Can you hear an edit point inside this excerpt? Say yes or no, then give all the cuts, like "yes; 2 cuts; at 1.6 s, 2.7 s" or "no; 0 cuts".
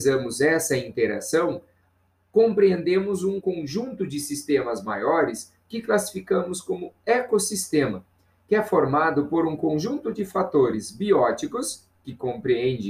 yes; 1 cut; at 3.4 s